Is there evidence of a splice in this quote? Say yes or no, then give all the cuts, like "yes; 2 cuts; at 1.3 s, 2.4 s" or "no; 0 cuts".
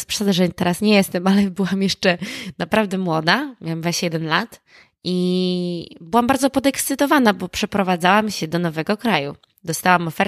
no; 0 cuts